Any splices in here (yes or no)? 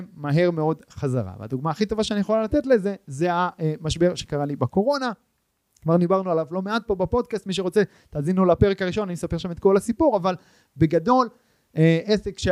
no